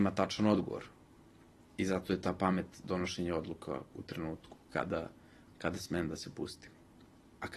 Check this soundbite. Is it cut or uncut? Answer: uncut